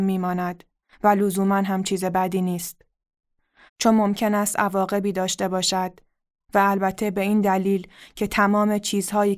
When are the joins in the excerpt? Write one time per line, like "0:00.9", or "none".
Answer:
0:03.7